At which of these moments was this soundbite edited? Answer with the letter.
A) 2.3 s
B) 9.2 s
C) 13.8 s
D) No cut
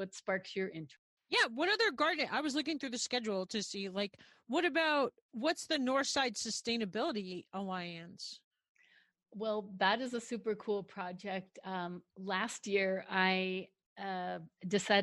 D